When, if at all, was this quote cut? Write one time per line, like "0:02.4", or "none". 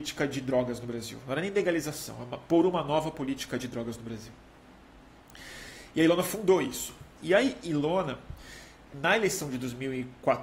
0:07.2
0:08.9